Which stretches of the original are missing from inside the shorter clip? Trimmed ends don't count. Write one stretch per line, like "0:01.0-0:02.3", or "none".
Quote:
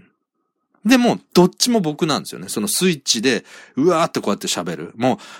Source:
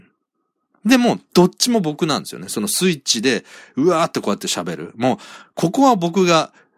none